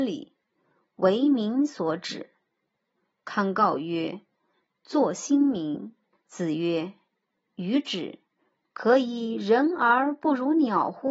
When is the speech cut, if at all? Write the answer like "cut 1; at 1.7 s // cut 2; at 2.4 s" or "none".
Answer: cut 1; at 2.8 s // cut 2; at 6.1 s // cut 3; at 8.6 s